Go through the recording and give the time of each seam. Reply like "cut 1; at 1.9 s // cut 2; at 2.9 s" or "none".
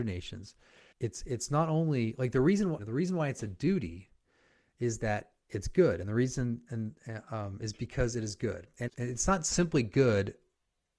cut 1; at 0.9 s // cut 2; at 2.8 s // cut 3; at 8.9 s